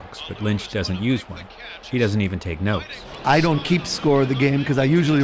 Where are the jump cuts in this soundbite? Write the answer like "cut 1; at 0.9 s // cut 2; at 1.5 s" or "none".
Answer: none